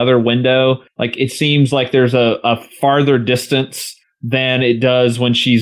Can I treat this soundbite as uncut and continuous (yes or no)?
yes